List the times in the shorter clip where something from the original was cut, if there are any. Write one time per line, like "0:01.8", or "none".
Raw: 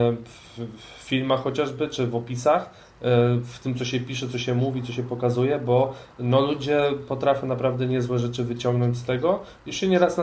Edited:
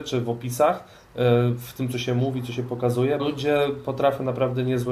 0:01.9
0:03.2